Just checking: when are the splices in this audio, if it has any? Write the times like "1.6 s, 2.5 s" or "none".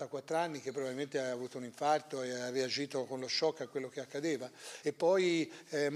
none